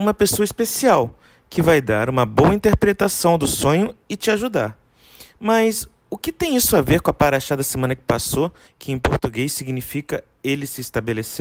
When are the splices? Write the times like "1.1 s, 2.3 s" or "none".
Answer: 8.7 s